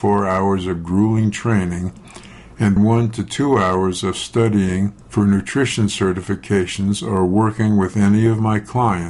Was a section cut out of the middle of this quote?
yes; 2 cuts; at 2.8 s, 5.0 s

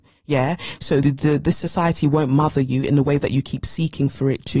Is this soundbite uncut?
no; 1 cut; at 1.0 s

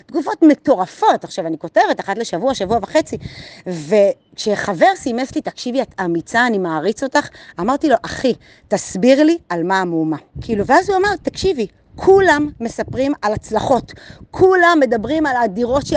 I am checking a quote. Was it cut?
yes; 1 cut; at 10.3 s

